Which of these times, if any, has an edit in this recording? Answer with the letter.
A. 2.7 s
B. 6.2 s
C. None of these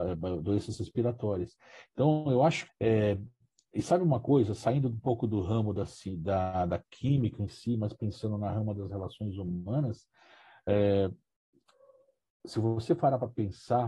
A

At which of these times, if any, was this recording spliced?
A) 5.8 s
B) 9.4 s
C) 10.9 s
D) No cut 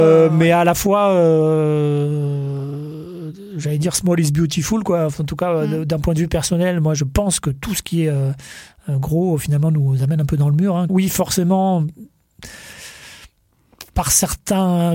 C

